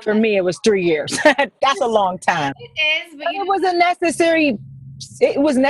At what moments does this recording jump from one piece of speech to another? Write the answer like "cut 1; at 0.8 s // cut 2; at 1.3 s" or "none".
cut 1; at 2.5 s